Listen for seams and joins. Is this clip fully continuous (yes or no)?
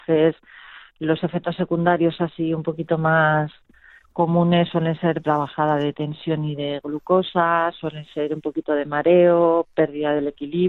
no